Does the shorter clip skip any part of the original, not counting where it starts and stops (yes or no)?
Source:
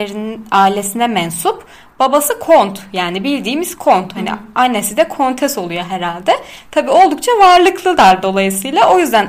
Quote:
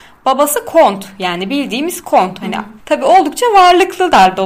yes